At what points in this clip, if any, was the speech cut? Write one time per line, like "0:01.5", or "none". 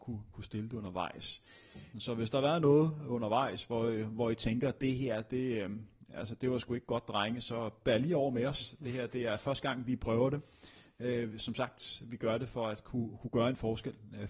0:01.9